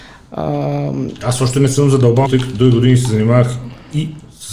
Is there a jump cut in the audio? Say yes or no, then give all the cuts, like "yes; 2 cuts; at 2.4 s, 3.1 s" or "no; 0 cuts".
yes; 1 cut; at 2.2 s